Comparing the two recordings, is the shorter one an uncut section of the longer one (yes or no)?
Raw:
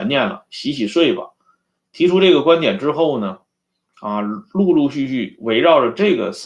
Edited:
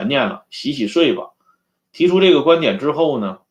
yes